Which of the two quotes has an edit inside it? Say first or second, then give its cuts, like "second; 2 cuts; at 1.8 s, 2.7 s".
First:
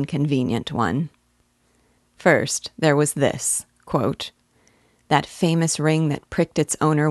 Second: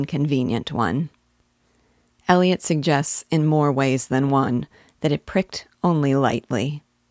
first; 1 cut; at 2.0 s